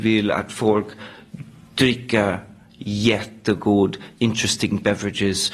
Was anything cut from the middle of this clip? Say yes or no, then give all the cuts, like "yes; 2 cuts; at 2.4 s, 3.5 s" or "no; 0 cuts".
yes; 1 cut; at 4.2 s